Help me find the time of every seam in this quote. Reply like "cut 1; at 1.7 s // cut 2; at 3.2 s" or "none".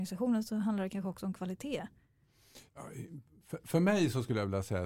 cut 1; at 2.7 s